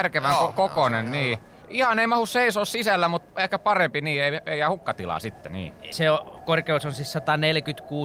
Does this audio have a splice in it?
yes; 2 cuts; at 1.6 s, 5.9 s

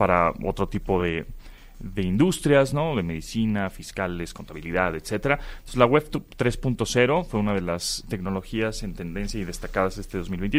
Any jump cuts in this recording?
no; 0 cuts

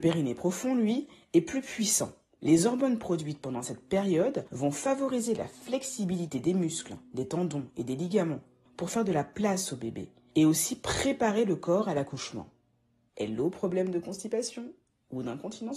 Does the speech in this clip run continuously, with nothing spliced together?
no; 2 cuts; at 2.4 s, 13.1 s

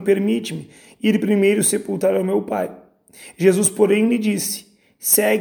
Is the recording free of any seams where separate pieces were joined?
yes; 0 cuts

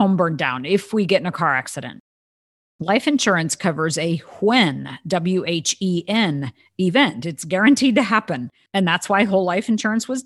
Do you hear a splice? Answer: yes; 1 cut; at 8.7 s

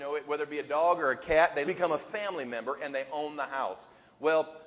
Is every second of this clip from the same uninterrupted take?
no; 1 cut; at 1.7 s

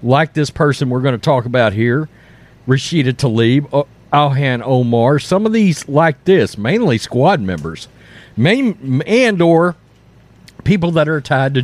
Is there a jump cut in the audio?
yes; 1 cut; at 9.0 s

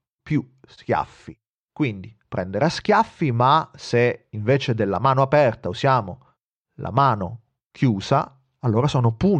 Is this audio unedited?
yes; 0 cuts

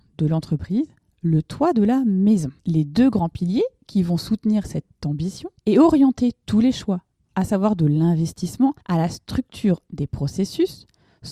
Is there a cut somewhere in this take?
yes; 3 cuts; at 2.6 s, 5.6 s, 8.8 s

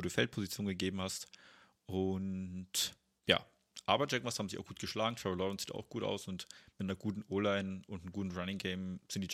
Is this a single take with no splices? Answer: yes; 0 cuts

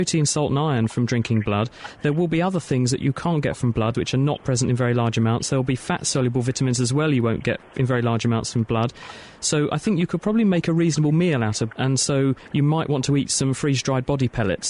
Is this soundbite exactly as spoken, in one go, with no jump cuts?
no; 2 cuts; at 3.9 s, 11.7 s

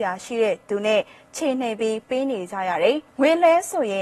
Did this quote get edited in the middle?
yes; 1 cut; at 3.1 s

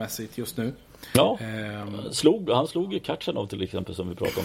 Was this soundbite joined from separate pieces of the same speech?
no; 0 cuts

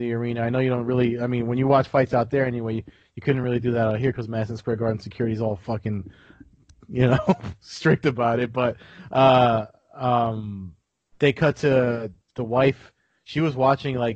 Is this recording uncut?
yes; 0 cuts

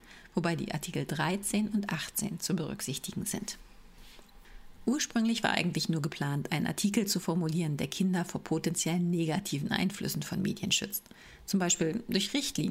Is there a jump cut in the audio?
no; 0 cuts

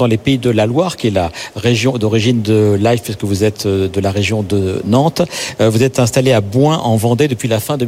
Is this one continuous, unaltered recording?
yes; 0 cuts

